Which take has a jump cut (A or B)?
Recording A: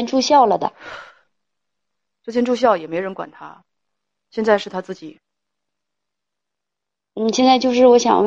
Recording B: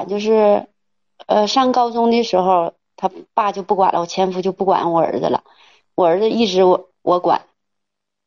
A